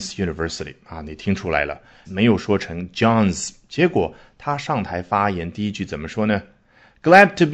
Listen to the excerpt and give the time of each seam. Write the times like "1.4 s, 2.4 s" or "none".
2.0 s